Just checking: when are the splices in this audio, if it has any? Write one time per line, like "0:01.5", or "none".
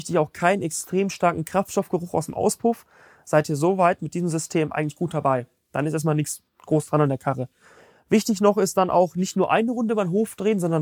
none